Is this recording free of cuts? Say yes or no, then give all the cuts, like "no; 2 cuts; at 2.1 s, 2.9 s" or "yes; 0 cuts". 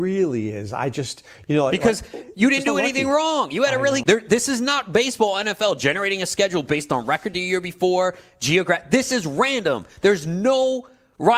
no; 1 cut; at 4.0 s